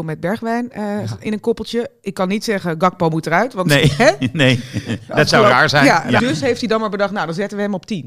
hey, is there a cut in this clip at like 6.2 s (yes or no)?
yes